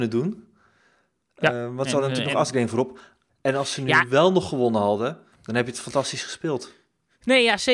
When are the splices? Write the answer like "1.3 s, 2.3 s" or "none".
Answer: 3.3 s, 5.4 s